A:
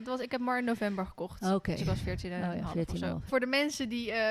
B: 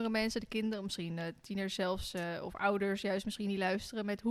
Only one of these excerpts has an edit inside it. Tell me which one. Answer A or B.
A